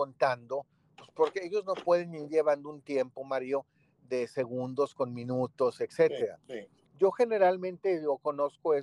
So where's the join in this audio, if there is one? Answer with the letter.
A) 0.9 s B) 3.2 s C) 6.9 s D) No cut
C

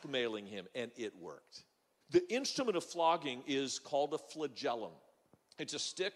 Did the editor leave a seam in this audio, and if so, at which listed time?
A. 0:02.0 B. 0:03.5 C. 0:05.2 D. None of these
A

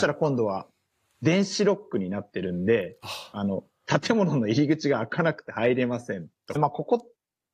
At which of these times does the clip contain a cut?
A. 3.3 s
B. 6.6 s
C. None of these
B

